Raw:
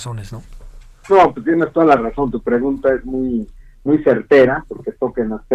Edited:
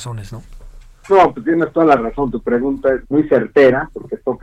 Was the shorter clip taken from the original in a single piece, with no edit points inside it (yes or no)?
no